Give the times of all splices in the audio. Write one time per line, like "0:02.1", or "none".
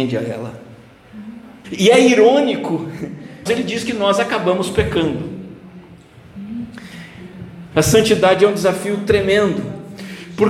0:01.6
0:03.5
0:07.7